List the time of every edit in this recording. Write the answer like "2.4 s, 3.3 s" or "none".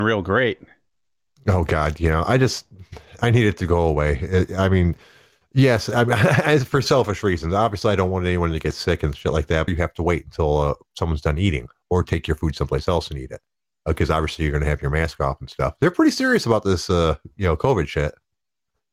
9.7 s